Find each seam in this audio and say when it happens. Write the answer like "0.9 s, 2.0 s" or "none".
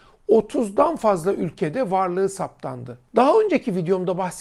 3.1 s